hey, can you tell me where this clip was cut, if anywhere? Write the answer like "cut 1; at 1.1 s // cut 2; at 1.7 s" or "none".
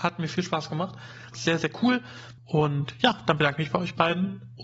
cut 1; at 1.3 s // cut 2; at 2.4 s